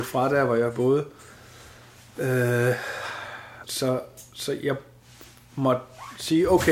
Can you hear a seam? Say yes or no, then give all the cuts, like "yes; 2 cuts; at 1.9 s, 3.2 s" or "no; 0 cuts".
yes; 1 cut; at 3.6 s